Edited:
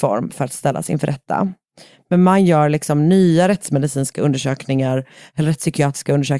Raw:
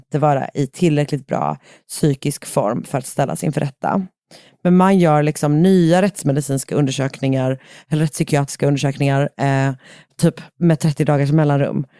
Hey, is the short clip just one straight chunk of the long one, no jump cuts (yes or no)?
yes